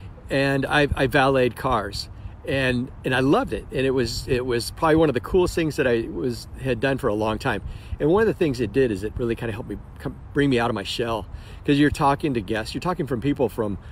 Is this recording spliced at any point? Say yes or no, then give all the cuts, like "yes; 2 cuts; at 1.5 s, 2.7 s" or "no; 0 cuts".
no; 0 cuts